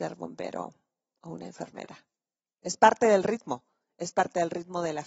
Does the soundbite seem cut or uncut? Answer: uncut